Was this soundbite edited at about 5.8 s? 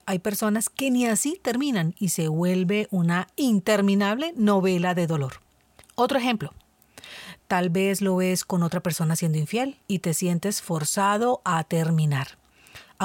yes; 3 cuts; at 5.8 s, 7.4 s, 9.8 s

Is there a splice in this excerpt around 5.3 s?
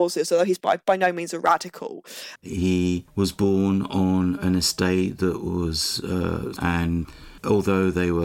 no; 2 cuts; at 2.4 s, 6.6 s

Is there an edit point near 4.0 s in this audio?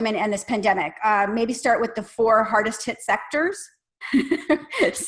yes; 1 cut; at 4.0 s

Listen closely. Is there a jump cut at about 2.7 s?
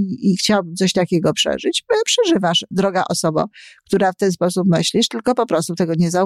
yes; 1 cut; at 2.7 s

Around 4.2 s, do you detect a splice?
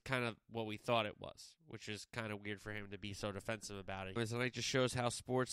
yes; 1 cut; at 4.2 s

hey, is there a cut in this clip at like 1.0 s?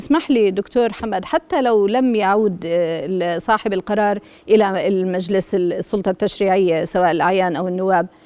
yes; 1 cut; at 1.0 s

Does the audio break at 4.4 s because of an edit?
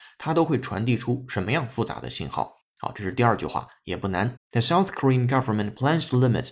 yes; 1 cut; at 4.4 s

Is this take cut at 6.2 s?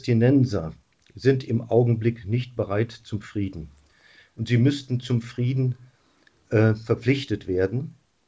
no; 0 cuts

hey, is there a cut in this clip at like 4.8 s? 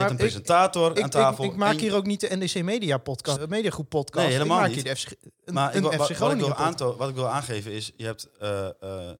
no; 2 cuts; at 1.0 s, 3.4 s

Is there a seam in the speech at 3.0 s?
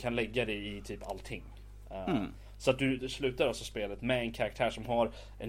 yes; 1 cut; at 3.0 s

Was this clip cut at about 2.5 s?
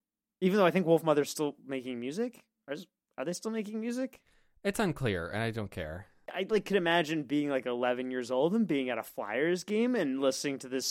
no; 0 cuts

